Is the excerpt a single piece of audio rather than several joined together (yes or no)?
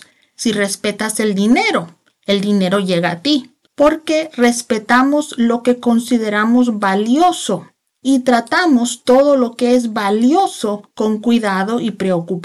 no